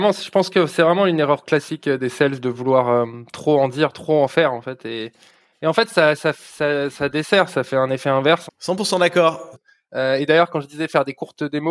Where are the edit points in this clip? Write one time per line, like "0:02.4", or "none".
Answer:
0:08.5
0:09.5